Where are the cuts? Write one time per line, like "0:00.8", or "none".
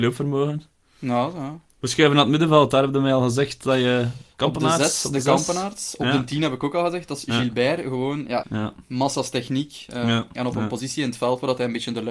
0:08.4
0:10.3